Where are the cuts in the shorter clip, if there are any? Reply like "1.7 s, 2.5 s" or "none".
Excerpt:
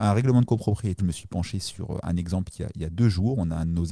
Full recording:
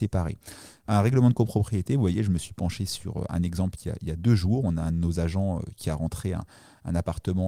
1.0 s